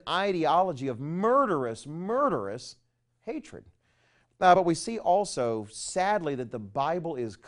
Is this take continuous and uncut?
yes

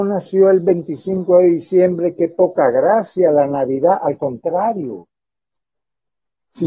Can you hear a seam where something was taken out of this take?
no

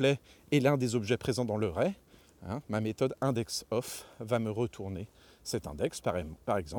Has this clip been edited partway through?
no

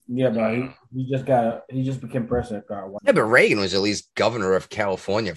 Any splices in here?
yes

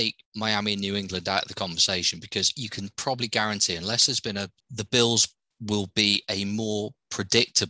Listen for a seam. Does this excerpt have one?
yes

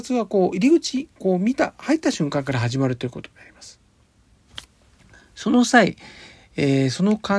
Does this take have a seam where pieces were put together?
no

